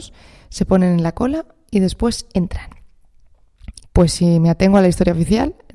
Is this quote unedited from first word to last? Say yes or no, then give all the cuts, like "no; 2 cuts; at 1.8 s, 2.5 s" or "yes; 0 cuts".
no; 1 cut; at 3.8 s